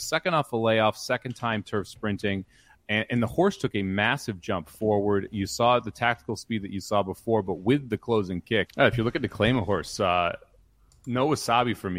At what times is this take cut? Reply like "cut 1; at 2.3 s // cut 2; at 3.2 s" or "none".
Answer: cut 1; at 8.7 s